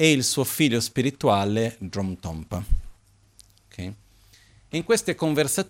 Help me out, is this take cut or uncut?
uncut